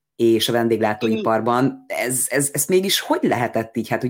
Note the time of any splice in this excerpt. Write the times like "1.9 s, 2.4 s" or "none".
none